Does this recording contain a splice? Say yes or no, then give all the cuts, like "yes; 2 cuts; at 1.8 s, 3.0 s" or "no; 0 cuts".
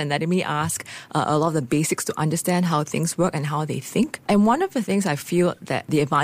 yes; 1 cut; at 4.2 s